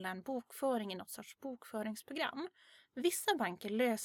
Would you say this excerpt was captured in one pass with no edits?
yes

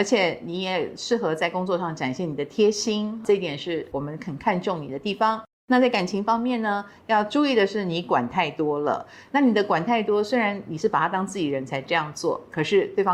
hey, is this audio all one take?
yes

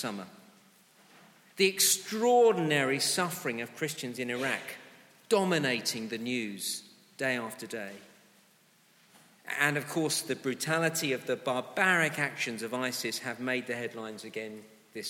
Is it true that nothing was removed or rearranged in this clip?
yes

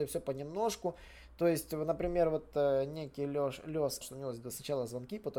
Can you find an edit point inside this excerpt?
yes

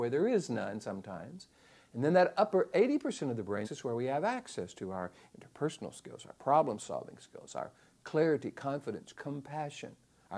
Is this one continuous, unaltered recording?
no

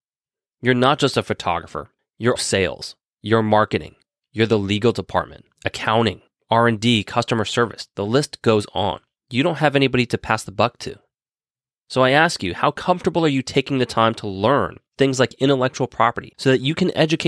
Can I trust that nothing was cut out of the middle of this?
no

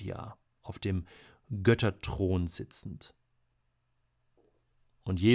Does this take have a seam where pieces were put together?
no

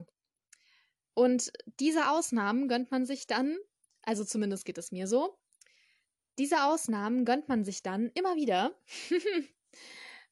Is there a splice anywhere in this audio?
no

